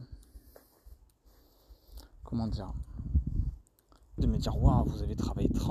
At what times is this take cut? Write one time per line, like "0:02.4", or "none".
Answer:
0:04.2